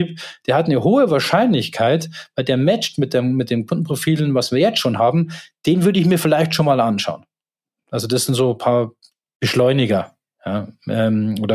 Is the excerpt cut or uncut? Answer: uncut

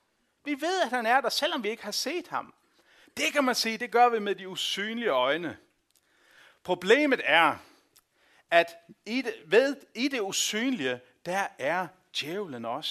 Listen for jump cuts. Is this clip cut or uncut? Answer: uncut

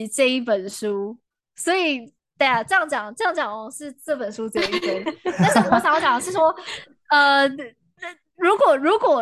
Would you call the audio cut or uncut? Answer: uncut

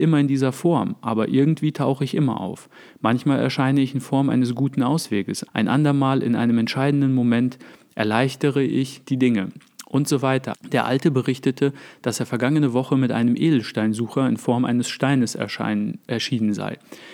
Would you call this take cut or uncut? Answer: cut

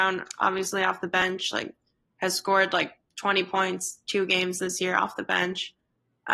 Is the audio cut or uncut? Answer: uncut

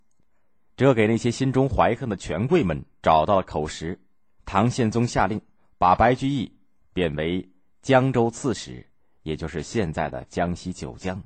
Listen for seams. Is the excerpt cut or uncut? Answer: cut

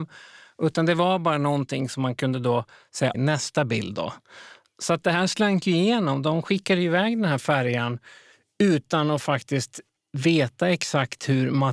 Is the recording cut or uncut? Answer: cut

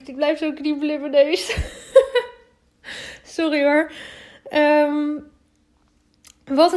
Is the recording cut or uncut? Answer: uncut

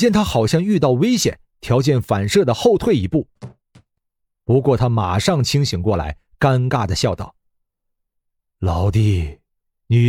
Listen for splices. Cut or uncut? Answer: uncut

